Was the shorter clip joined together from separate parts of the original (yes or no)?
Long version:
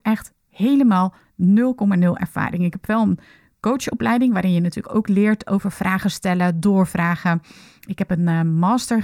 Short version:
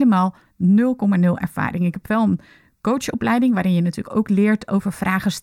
no